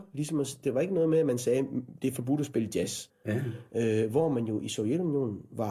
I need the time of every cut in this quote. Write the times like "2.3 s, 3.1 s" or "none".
3.1 s